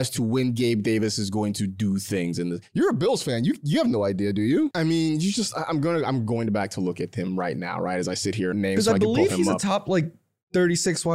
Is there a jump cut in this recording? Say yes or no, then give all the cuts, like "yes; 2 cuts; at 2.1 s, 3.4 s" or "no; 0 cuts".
yes; 2 cuts; at 4.7 s, 8.5 s